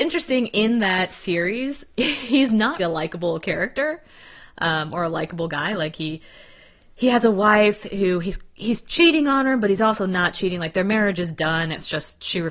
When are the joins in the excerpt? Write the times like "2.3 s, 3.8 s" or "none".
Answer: 2.8 s